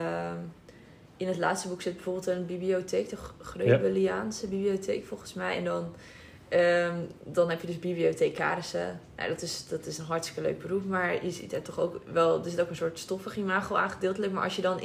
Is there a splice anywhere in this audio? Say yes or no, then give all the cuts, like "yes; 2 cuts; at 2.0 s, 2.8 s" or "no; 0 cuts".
no; 0 cuts